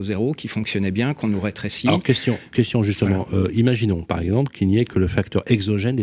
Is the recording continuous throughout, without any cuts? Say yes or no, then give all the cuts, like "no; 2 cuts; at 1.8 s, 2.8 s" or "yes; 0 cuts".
yes; 0 cuts